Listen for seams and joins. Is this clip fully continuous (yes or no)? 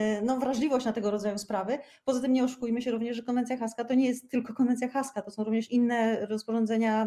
yes